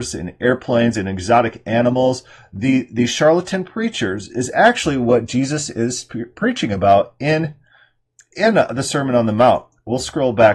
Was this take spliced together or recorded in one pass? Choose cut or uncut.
uncut